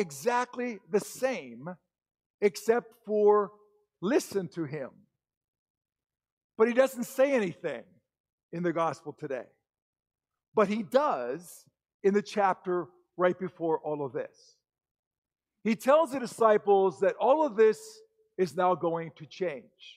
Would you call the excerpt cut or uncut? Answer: uncut